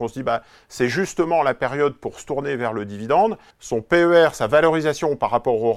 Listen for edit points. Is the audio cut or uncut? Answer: cut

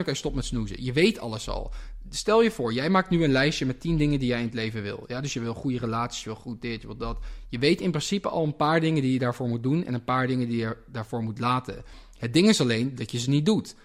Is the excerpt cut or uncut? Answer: uncut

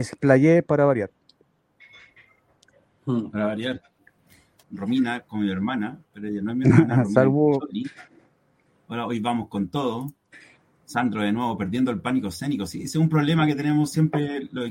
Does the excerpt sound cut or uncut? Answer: cut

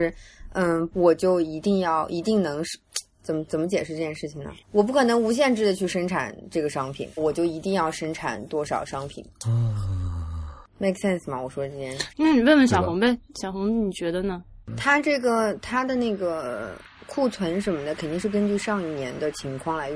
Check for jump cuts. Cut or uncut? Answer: cut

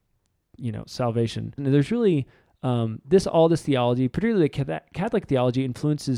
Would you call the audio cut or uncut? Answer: cut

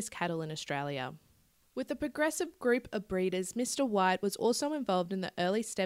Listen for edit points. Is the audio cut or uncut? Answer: uncut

